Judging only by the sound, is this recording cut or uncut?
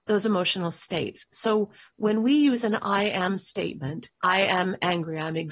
cut